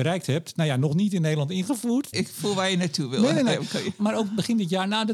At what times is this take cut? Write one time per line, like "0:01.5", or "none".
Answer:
0:02.1
0:04.0